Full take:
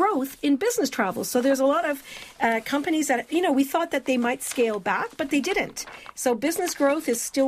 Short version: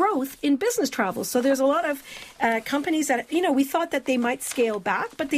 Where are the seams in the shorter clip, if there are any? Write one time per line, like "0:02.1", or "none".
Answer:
none